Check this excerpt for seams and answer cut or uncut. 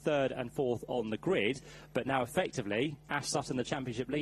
uncut